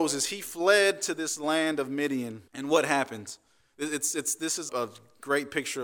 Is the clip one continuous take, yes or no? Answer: no